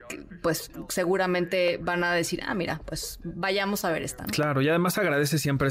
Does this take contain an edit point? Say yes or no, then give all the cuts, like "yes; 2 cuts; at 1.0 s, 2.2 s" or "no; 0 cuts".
no; 0 cuts